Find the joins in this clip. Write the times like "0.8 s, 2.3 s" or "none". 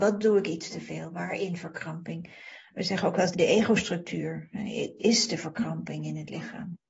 3.3 s, 5.0 s